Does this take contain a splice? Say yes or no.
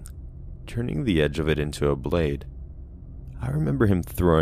yes